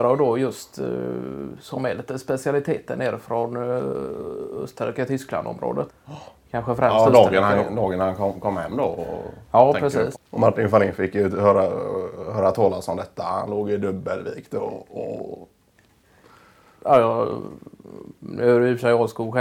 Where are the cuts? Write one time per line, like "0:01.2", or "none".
0:05.9
0:10.1